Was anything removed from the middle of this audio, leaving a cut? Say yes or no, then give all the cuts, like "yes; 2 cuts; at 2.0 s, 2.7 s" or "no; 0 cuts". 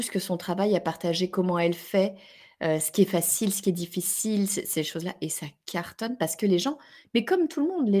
no; 0 cuts